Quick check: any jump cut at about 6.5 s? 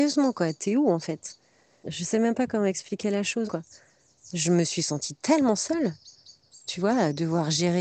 no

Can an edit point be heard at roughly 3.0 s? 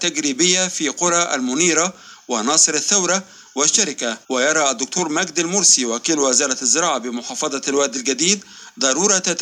no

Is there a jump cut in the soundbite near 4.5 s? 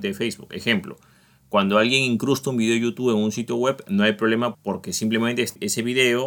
yes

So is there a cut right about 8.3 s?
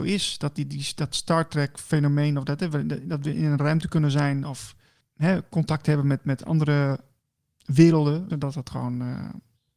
yes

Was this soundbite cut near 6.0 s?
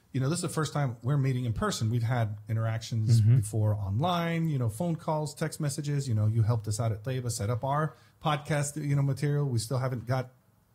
no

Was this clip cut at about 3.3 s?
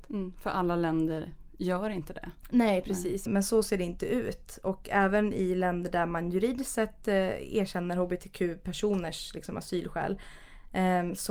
yes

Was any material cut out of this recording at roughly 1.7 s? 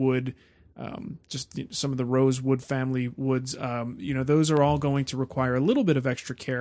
no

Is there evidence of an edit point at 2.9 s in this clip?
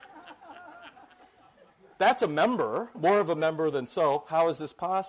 yes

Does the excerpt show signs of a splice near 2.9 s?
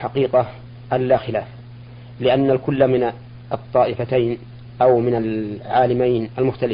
no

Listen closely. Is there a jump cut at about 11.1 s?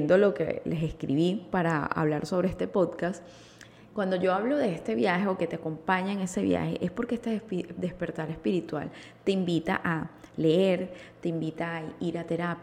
no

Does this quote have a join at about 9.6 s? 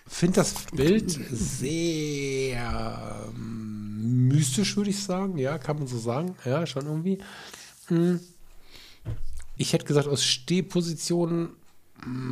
yes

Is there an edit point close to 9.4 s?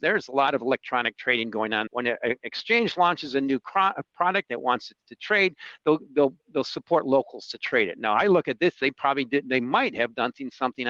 no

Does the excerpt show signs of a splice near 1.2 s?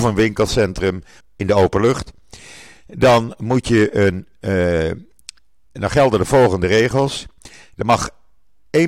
yes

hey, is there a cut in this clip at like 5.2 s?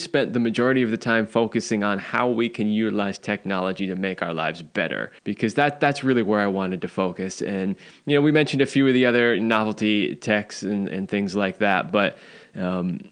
yes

